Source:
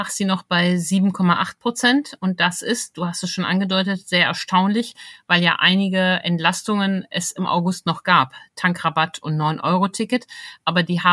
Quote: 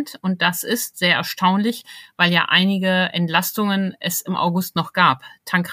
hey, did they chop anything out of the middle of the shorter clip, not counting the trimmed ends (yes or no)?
yes